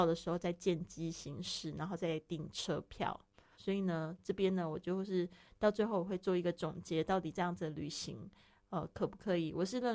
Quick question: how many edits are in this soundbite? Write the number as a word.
one